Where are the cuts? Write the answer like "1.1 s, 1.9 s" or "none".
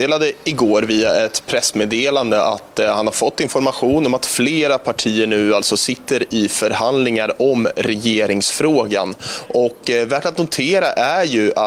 9.5 s